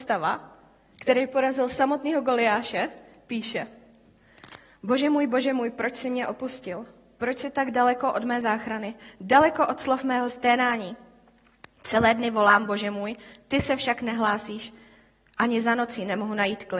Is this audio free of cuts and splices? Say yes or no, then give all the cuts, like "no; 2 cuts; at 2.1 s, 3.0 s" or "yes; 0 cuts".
yes; 0 cuts